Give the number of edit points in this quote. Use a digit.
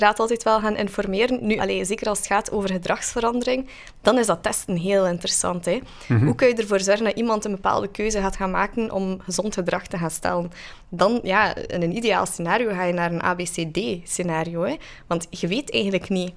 1